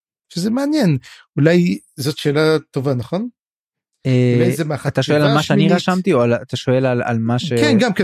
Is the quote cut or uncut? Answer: uncut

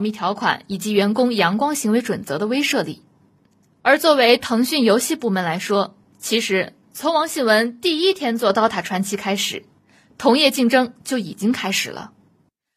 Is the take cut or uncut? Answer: uncut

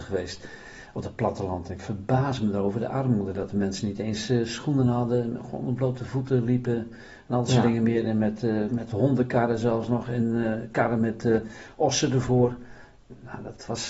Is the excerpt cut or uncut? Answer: uncut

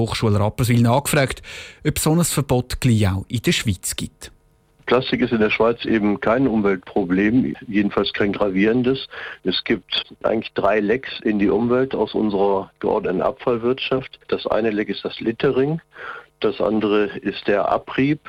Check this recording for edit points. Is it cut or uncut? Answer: uncut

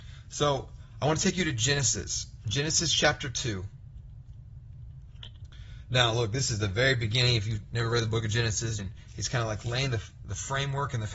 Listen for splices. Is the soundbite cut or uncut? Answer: cut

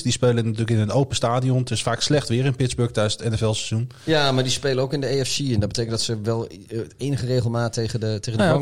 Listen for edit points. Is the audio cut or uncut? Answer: uncut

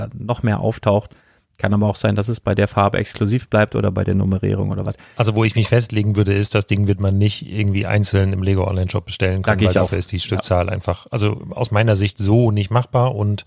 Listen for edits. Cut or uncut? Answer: uncut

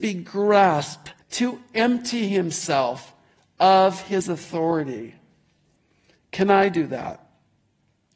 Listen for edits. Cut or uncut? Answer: cut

